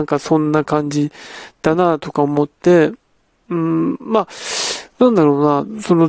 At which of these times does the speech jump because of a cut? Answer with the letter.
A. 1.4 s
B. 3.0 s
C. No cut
C